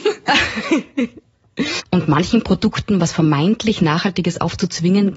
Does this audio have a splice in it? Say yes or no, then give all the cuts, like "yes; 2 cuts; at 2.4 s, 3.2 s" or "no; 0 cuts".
yes; 1 cut; at 1.8 s